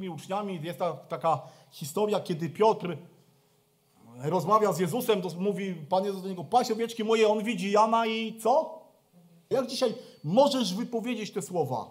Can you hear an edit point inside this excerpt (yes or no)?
yes